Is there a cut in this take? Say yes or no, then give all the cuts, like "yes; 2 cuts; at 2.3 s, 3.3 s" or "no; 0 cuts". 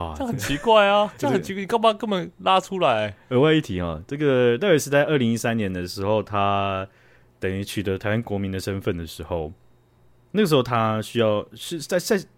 no; 0 cuts